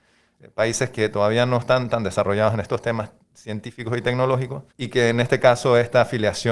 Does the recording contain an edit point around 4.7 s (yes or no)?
yes